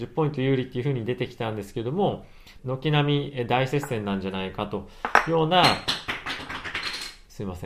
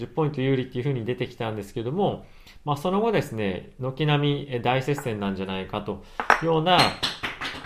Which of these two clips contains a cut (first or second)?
first